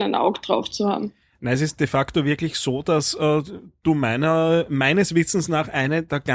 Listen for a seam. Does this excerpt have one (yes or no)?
no